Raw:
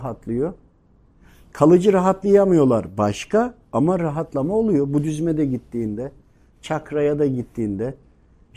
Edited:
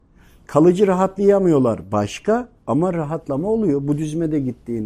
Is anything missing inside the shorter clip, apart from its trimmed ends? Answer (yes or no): no